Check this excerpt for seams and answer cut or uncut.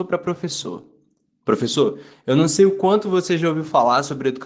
cut